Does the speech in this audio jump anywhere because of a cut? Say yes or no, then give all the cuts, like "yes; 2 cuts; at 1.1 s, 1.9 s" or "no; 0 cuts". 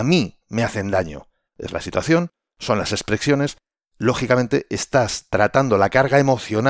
yes; 1 cut; at 1.4 s